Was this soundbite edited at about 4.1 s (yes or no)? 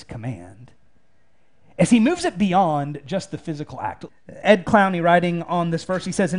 yes